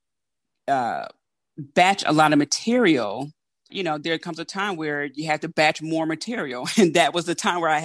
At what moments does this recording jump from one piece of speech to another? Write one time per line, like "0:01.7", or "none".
0:03.7